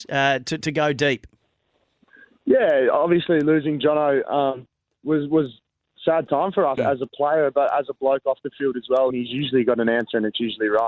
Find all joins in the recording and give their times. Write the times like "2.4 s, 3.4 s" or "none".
6.8 s, 9.1 s